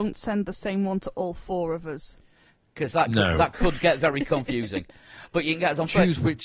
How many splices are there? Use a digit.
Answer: 0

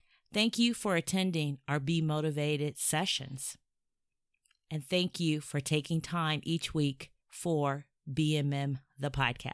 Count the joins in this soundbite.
1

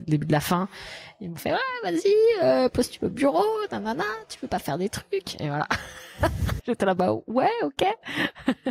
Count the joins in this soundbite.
1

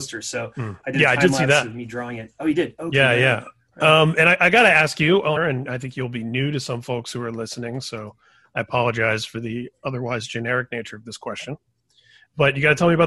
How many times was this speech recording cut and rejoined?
1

